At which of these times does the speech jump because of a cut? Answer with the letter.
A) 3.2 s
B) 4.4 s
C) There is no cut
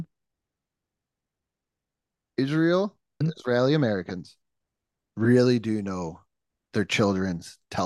A